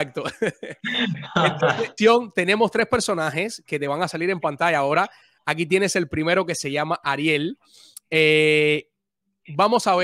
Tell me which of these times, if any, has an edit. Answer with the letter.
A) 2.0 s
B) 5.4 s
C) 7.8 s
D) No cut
A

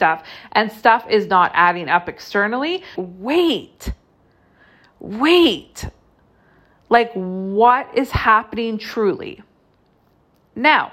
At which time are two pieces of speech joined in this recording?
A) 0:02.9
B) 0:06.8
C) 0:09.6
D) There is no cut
A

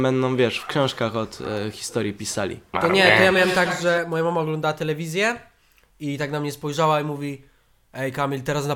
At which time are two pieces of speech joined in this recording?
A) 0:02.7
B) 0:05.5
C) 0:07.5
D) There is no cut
A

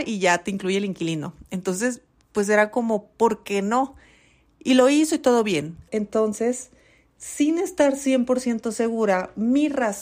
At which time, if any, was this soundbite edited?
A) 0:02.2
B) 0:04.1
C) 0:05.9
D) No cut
C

